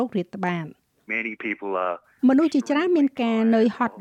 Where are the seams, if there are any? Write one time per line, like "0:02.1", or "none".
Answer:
0:01.1